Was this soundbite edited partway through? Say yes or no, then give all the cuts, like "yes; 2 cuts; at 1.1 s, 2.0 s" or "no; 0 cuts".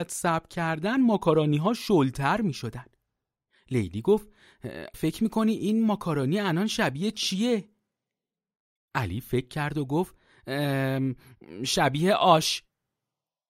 yes; 1 cut; at 4.9 s